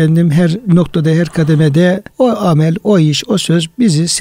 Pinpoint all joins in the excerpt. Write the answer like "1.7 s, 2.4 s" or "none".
2.1 s